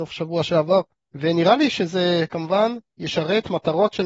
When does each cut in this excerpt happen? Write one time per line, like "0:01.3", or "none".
0:01.1

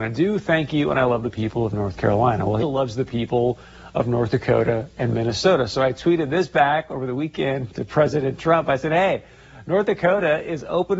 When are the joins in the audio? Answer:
0:02.6

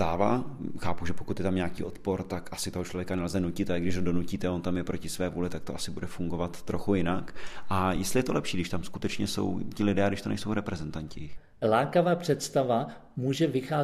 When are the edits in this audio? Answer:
0:11.6

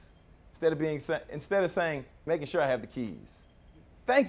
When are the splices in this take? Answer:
0:02.3

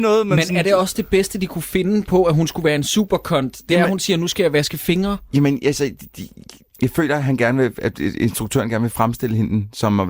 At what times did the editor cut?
none

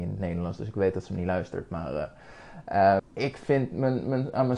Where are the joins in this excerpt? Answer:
0:03.0

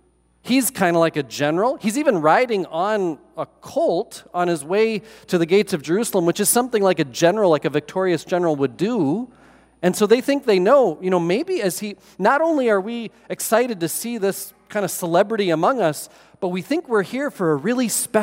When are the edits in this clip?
none

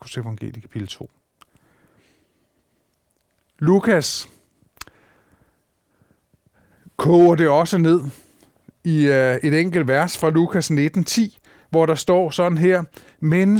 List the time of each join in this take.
none

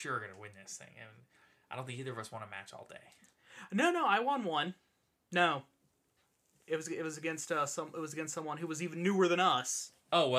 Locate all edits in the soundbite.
0:05.3

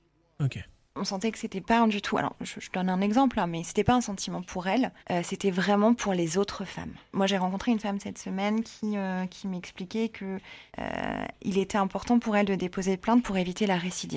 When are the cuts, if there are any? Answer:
0:05.0
0:07.1
0:10.7

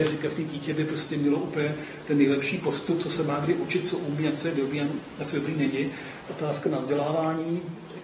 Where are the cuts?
0:06.3

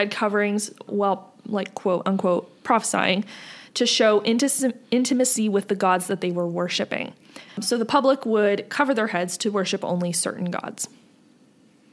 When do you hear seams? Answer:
0:07.5

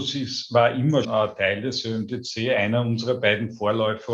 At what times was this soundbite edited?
0:01.0

